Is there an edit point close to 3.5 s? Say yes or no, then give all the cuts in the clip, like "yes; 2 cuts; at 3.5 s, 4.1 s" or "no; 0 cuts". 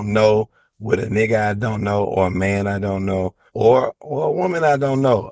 yes; 1 cut; at 3.5 s